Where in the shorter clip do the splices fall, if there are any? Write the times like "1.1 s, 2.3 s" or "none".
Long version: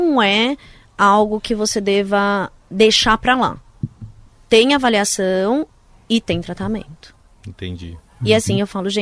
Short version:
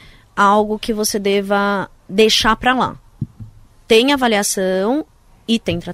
none

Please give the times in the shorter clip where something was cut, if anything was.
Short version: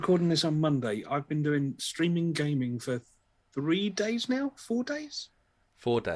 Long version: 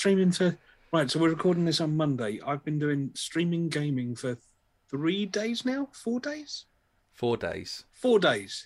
none

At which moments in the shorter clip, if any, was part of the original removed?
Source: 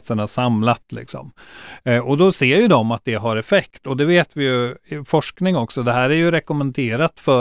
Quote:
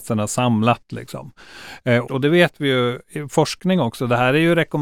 2.0 s

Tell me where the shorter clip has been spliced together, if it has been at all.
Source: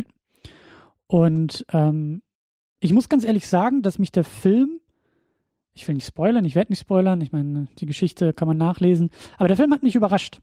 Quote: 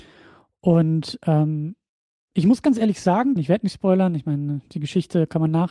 3.4 s

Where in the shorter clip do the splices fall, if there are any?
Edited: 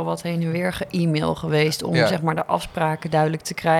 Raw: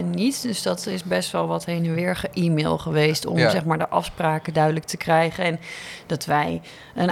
none

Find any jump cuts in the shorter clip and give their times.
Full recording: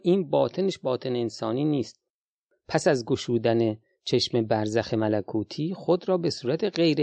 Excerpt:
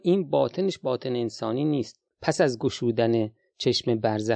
2.1 s

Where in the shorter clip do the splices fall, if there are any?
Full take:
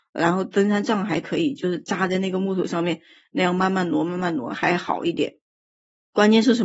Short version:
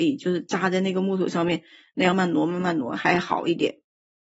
2.1 s

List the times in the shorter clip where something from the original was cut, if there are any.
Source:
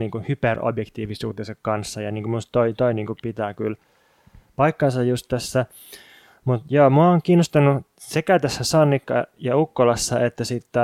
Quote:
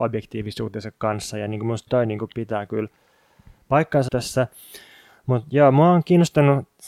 1.9 s, 4.1 s

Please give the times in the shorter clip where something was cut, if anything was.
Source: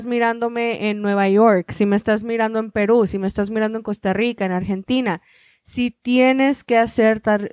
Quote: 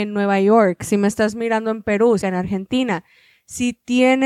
2.2 s

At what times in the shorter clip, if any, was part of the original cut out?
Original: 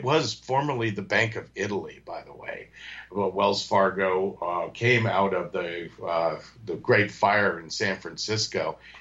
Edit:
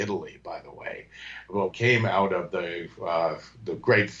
1.7 s

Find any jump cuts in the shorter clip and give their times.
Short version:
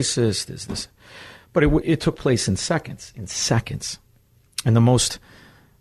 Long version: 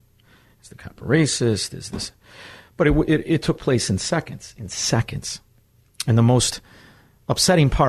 1.8 s

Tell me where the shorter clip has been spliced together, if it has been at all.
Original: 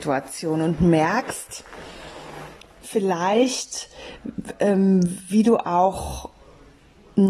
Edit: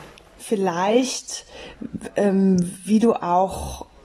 none

